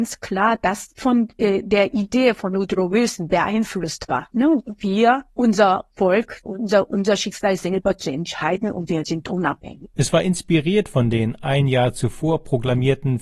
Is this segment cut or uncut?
cut